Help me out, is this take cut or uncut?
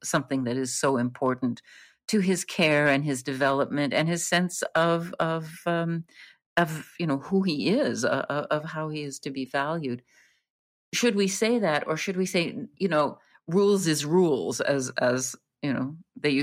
uncut